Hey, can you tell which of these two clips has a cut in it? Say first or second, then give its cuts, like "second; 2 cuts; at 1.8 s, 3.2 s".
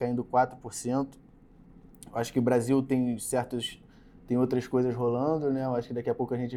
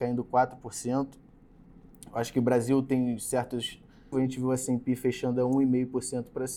second; 1 cut; at 4.1 s